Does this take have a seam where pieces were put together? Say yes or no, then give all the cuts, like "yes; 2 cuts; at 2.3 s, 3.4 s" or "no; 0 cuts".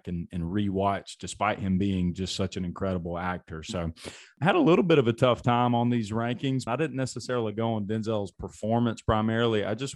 yes; 1 cut; at 6.7 s